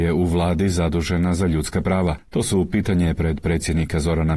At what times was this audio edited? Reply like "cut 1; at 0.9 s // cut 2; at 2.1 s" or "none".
none